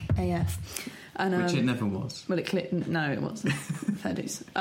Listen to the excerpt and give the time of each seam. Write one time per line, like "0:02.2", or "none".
none